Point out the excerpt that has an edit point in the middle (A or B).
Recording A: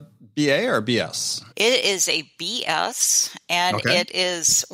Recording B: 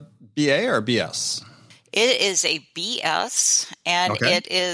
A